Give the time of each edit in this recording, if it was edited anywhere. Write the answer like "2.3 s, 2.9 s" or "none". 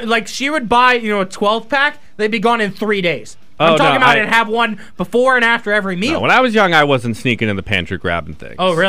none